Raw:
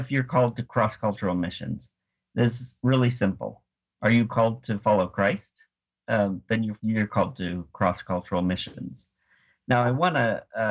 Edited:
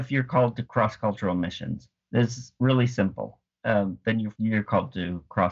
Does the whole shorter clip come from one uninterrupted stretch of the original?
no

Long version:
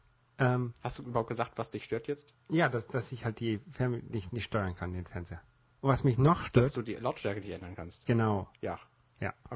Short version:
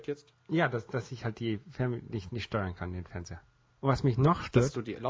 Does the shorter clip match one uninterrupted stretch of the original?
yes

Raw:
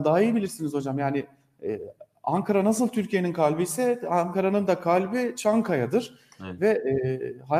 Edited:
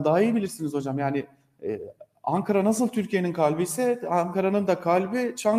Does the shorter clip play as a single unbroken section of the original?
yes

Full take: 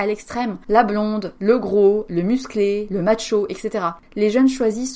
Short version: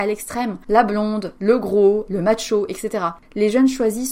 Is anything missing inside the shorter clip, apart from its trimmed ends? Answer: yes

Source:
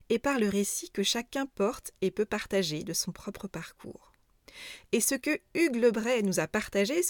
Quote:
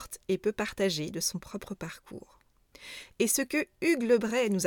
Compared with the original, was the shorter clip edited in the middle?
no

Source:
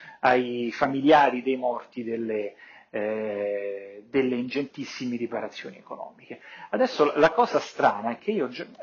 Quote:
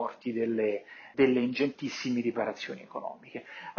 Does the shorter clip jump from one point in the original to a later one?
yes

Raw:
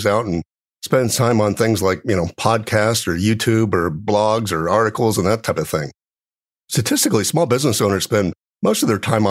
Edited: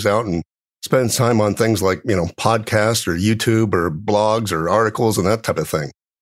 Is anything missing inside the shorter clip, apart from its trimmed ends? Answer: no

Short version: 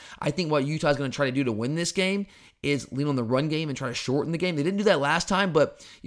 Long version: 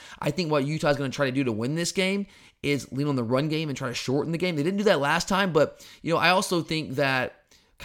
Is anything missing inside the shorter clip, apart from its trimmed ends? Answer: no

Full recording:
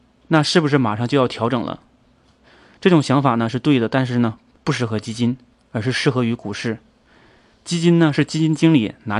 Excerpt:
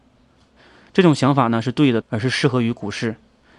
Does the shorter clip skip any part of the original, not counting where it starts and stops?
yes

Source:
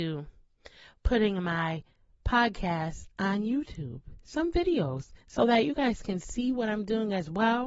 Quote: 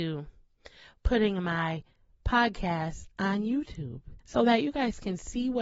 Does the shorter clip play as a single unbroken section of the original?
no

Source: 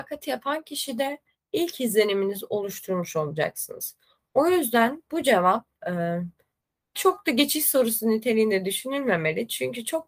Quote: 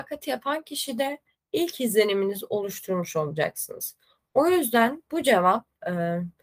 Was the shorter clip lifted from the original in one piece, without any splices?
yes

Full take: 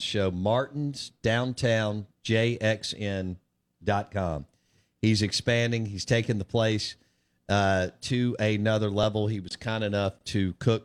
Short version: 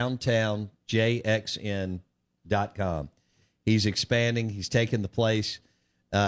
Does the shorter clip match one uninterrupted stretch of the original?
yes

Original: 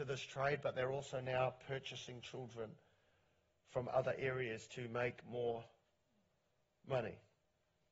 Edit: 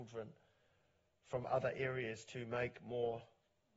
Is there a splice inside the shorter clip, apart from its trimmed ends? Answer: no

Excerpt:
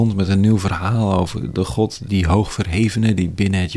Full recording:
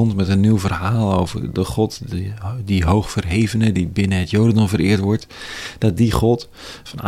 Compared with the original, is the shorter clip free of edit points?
no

